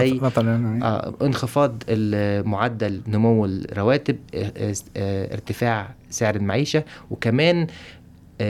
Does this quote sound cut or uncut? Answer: uncut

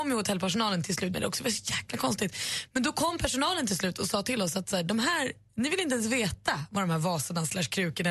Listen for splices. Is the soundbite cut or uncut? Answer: cut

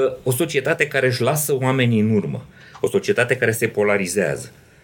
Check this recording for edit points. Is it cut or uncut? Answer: uncut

